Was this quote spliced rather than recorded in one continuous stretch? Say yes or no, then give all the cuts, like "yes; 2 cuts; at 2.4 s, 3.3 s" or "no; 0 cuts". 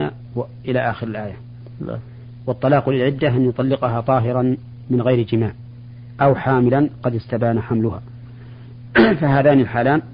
no; 0 cuts